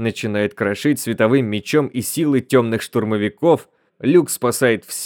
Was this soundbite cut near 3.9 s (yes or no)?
yes